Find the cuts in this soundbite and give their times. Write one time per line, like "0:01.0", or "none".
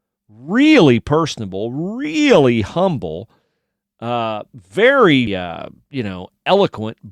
0:05.3